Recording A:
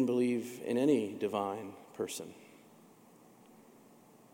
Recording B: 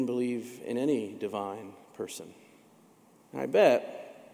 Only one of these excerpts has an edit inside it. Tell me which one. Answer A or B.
B